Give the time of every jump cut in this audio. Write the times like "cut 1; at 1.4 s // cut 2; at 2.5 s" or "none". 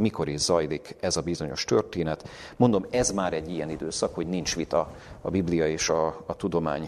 none